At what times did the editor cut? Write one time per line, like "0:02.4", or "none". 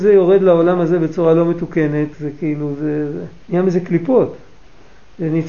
0:02.1
0:03.4